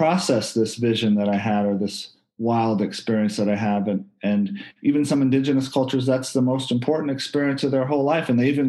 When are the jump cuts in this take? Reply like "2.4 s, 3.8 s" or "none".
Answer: none